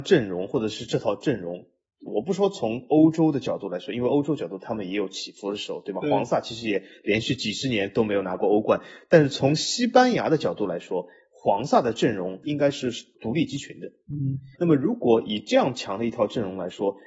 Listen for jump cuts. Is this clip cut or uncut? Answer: cut